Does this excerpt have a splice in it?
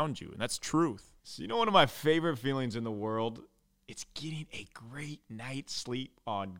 yes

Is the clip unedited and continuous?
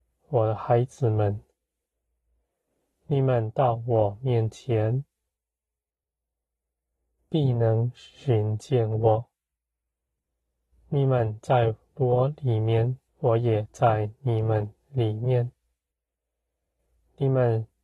no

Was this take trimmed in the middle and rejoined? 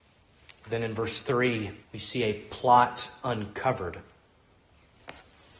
yes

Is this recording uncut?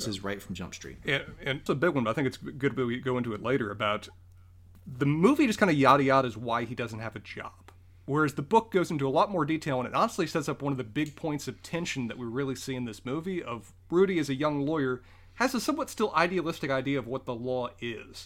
no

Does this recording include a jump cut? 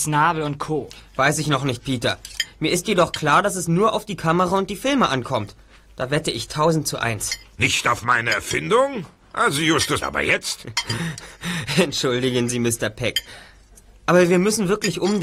yes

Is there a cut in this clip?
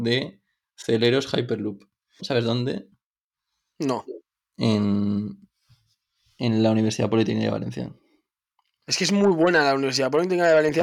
yes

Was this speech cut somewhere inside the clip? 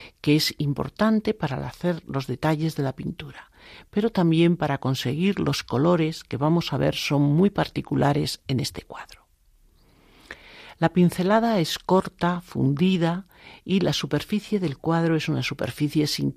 no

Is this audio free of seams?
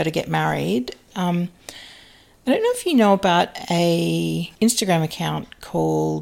no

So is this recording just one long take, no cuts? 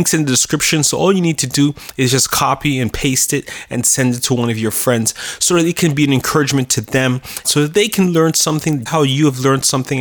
no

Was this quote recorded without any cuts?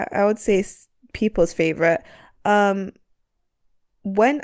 yes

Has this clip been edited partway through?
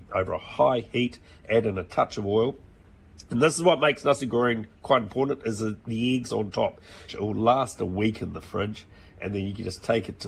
yes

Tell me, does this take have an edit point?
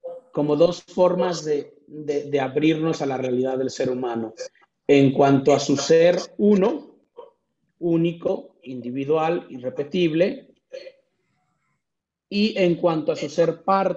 no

